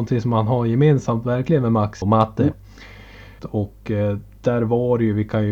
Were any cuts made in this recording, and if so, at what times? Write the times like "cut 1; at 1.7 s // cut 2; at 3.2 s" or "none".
cut 1; at 2.0 s // cut 2; at 3.4 s

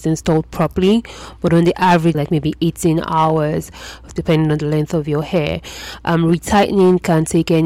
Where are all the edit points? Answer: cut 1; at 2.1 s // cut 2; at 4.1 s

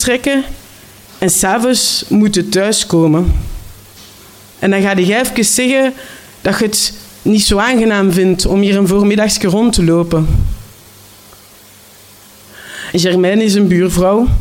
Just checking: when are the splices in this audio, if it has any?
cut 1; at 4.5 s // cut 2; at 12.9 s

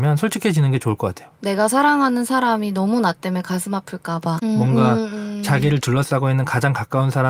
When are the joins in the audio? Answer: cut 1; at 1.4 s // cut 2; at 4.4 s

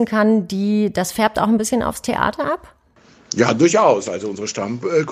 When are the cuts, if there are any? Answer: none

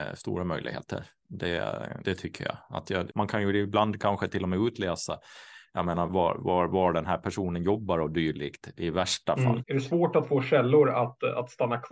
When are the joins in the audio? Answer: cut 1; at 2.0 s // cut 2; at 3.1 s // cut 3; at 9.6 s

